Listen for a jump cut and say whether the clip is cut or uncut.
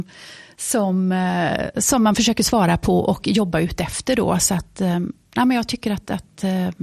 uncut